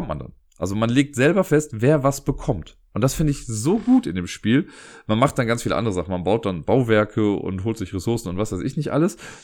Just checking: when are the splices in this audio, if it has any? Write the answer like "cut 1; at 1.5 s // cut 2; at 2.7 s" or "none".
none